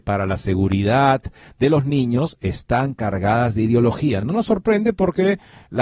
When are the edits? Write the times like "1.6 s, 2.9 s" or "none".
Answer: none

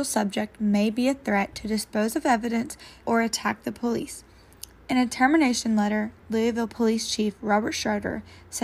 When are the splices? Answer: 3.0 s, 4.8 s

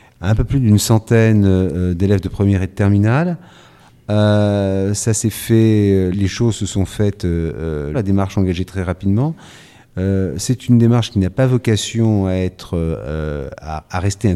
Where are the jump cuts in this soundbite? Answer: 6.1 s, 7.9 s

